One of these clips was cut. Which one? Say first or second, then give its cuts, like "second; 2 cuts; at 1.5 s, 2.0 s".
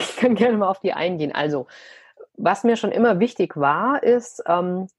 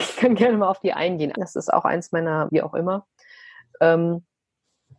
second; 2 cuts; at 1.3 s, 2.5 s